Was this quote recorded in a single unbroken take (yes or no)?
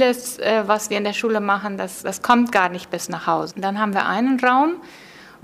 no